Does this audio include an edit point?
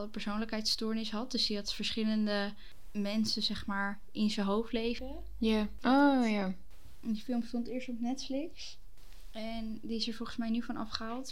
yes; 1 cut; at 5.8 s

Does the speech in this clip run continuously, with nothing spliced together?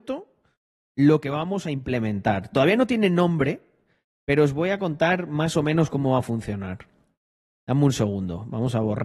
yes; 0 cuts

